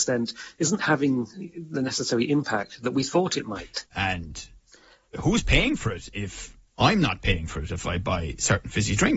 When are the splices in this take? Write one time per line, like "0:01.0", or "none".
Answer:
0:03.9
0:06.7